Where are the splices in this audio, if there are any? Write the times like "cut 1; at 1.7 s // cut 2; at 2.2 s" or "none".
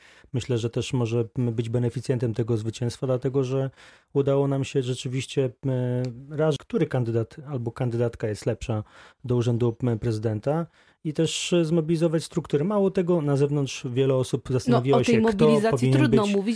cut 1; at 6.6 s